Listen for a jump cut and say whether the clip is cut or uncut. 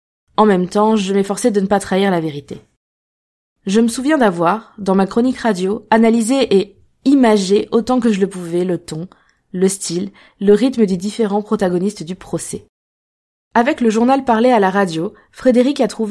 uncut